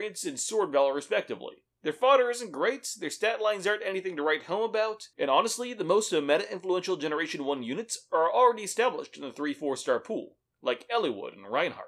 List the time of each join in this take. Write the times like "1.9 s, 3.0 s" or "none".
1.7 s